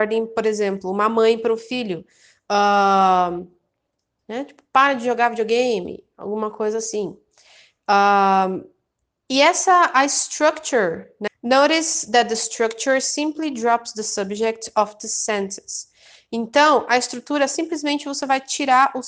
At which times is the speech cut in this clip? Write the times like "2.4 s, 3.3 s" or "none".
4.2 s, 11.3 s